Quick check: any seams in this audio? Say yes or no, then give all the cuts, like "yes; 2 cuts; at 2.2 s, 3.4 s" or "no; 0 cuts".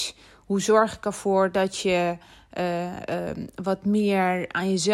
no; 0 cuts